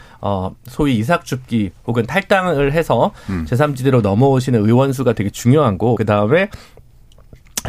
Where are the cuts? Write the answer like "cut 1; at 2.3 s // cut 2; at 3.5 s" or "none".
cut 1; at 5.9 s